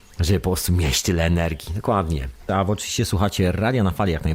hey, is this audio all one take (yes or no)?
yes